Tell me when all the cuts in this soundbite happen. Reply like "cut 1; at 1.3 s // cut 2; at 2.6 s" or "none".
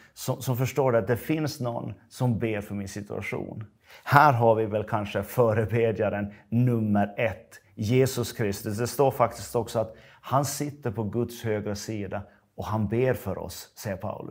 none